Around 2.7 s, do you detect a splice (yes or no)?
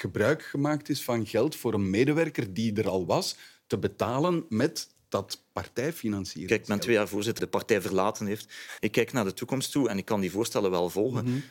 no